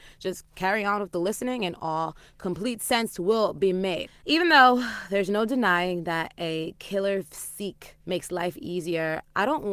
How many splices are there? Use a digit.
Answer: 2